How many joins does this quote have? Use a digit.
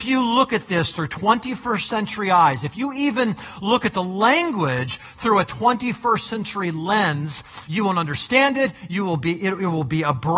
1